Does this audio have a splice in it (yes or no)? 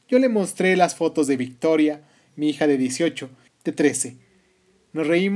yes